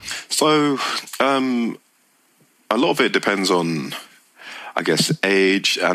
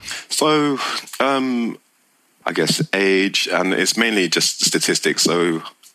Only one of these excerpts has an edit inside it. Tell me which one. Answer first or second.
second